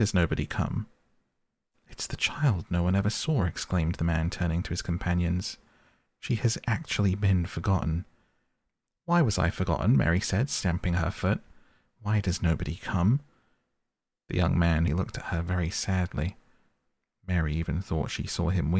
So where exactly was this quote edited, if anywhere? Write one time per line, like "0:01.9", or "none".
0:14.9

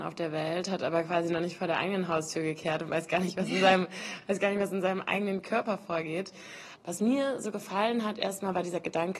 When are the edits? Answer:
none

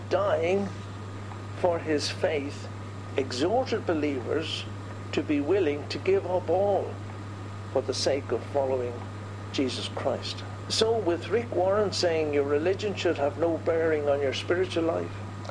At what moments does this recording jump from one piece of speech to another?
0:10.6

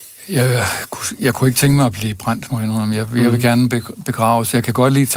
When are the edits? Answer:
none

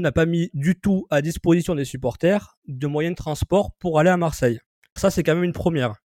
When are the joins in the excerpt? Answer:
0:05.0

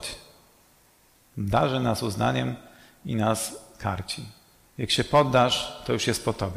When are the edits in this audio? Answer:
0:01.1
0:04.7

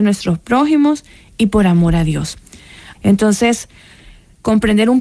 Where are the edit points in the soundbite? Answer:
0:02.9

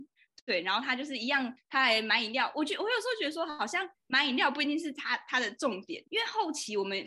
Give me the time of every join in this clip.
0:06.0

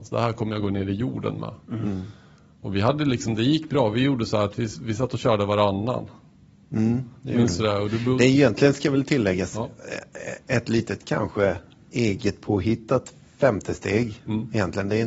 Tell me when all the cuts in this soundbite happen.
none

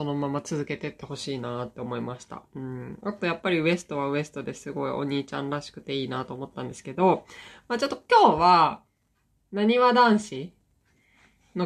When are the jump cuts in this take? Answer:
none

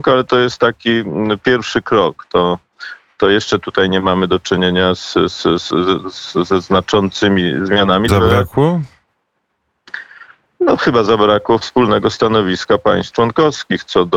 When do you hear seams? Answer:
0:08.1

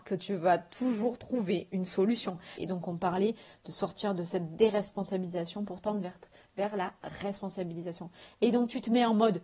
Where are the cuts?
0:02.6

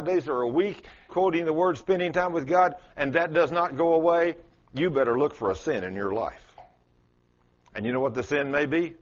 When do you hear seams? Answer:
0:01.1

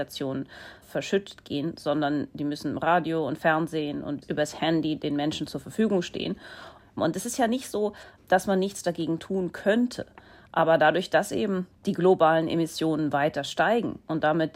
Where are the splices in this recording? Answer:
0:06.8

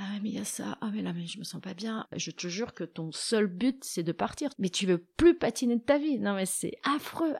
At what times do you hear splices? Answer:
0:02.0
0:04.5

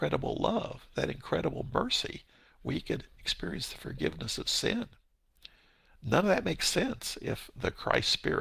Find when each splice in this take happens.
none

